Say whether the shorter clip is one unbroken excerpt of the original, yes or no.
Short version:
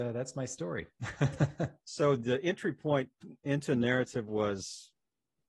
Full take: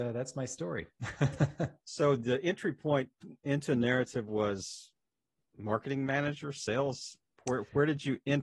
yes